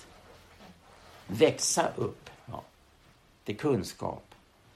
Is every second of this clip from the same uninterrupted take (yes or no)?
no